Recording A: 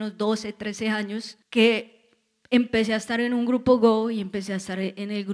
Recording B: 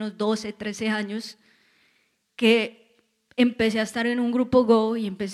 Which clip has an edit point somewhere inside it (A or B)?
A